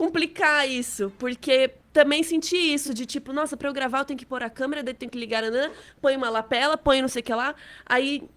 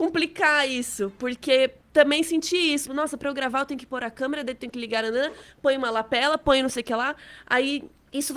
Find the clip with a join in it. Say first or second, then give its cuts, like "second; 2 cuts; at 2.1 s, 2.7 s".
second; 1 cut; at 2.8 s